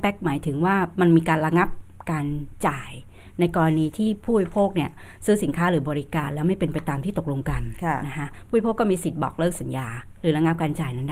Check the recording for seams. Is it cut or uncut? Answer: uncut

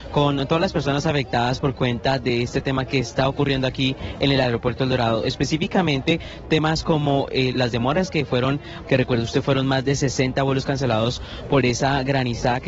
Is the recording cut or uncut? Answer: cut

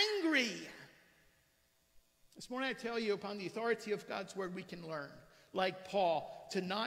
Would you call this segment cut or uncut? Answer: uncut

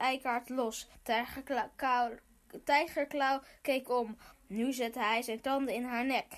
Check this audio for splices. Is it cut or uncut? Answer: cut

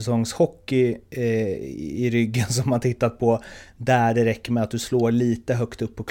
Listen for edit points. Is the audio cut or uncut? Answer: uncut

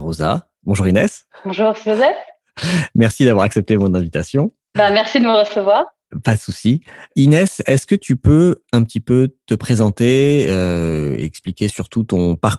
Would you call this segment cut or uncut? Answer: uncut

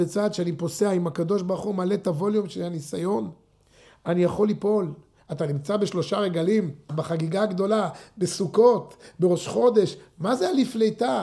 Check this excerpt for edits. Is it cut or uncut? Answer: cut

